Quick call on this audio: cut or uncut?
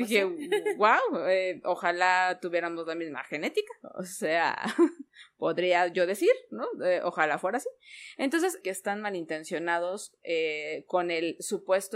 cut